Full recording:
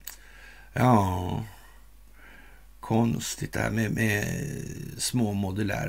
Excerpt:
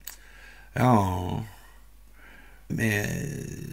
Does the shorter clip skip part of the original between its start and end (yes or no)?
yes